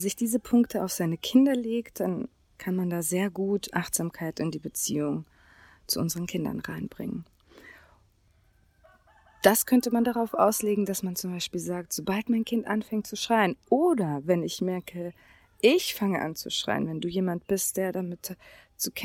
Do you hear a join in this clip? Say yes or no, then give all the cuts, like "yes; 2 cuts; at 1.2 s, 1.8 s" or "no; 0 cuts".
no; 0 cuts